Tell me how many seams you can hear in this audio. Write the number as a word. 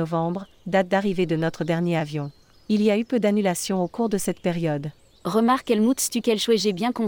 zero